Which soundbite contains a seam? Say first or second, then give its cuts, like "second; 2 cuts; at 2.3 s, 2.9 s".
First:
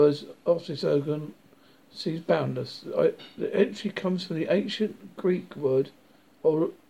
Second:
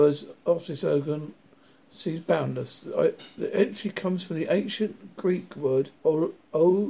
second; 1 cut; at 6.0 s